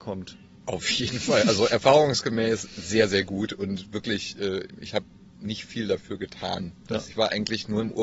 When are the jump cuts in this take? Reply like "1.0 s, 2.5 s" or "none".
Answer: 7.1 s